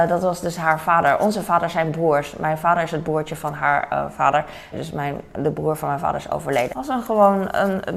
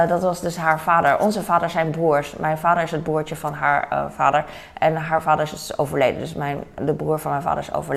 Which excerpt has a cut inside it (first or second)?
first